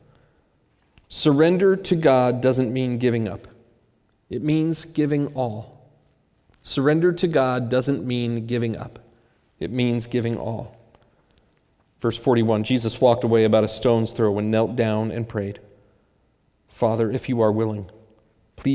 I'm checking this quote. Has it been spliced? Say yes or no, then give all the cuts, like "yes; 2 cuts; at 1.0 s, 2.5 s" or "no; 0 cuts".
no; 0 cuts